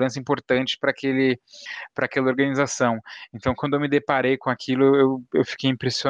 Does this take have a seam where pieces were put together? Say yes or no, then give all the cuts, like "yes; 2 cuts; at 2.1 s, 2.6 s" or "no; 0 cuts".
no; 0 cuts